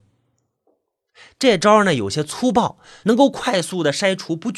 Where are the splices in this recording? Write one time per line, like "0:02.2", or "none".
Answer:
0:03.0